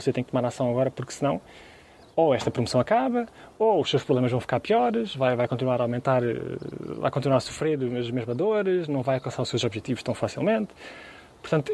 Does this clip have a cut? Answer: no; 0 cuts

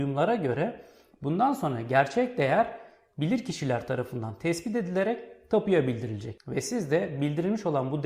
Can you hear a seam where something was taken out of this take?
no; 0 cuts

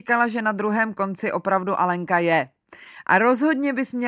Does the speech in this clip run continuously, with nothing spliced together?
yes; 0 cuts

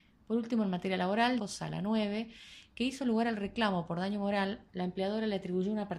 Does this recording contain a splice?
yes; 2 cuts; at 1.4 s, 4.7 s

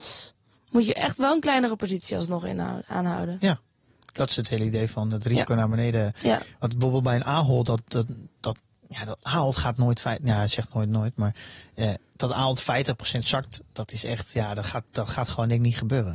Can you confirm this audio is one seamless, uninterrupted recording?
yes; 0 cuts

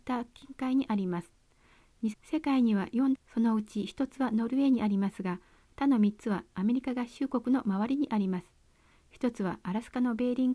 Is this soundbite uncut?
no; 2 cuts; at 2.1 s, 3.1 s

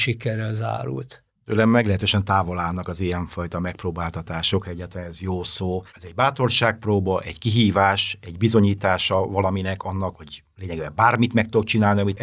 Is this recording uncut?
no; 2 cuts; at 5.9 s, 10.1 s

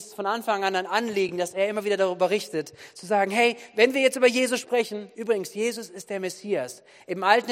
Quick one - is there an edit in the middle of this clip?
no; 0 cuts

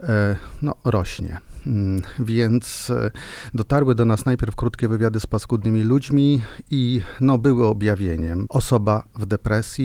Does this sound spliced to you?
yes; 1 cut; at 8.5 s

